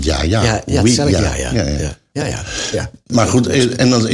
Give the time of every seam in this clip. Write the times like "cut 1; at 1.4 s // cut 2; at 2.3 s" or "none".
none